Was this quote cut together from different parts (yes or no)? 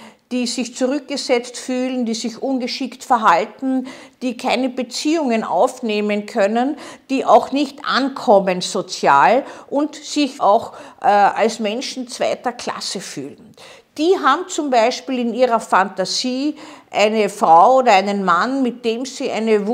yes